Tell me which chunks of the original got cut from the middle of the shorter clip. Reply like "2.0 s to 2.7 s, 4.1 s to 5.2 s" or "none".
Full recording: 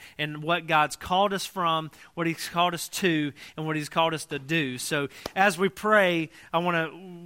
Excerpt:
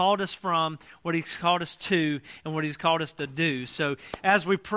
none